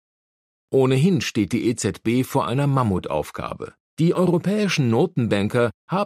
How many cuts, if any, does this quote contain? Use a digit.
1